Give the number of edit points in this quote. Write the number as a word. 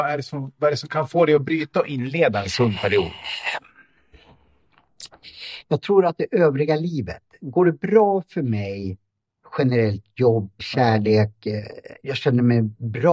two